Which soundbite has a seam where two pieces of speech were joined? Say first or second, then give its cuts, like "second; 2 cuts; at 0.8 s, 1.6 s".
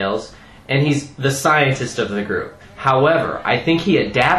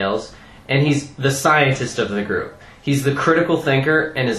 first; 1 cut; at 2.6 s